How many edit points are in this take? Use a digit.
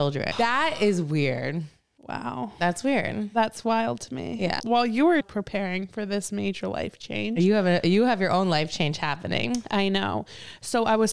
0